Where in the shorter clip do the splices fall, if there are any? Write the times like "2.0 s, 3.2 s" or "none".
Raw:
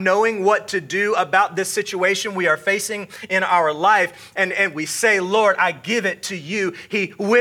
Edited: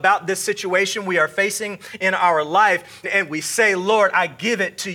3.0 s